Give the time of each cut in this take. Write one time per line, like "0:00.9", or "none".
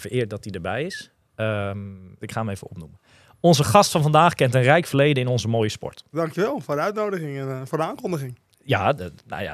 0:02.2
0:06.1